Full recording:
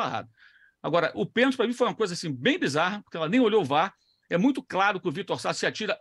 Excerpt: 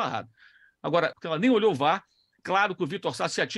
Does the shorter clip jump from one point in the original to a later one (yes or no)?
yes